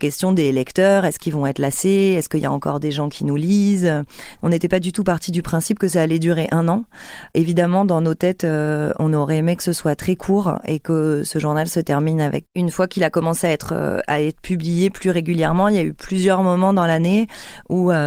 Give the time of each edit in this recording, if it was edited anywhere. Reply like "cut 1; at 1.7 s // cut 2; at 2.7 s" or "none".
cut 1; at 12.5 s